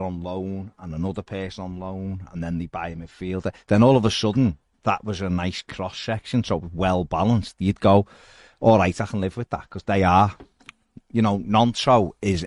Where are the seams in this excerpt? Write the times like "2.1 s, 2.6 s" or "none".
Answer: none